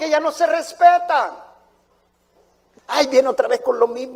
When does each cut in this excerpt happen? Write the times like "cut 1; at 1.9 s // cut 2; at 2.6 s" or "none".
none